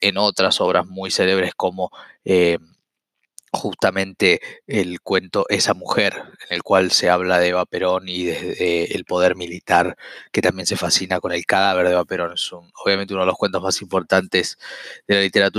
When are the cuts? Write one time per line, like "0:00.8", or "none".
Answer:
none